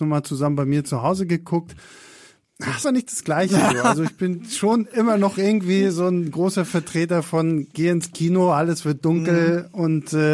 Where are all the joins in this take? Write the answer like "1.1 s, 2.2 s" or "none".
2.8 s